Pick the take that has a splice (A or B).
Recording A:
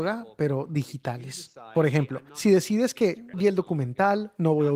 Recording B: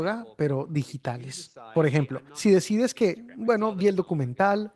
A